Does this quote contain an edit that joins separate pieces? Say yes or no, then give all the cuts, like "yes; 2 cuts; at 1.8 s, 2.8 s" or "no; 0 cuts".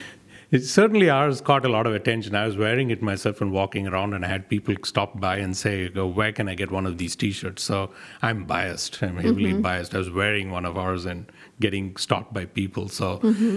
no; 0 cuts